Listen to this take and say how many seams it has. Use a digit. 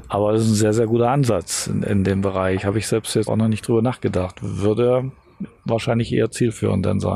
1